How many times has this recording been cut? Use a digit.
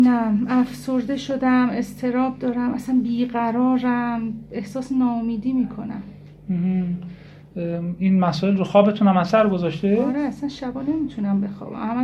0